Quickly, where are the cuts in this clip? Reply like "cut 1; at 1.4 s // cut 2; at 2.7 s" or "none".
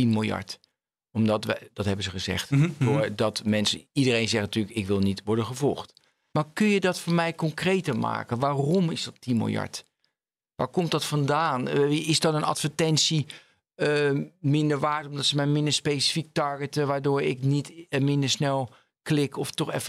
cut 1; at 6.3 s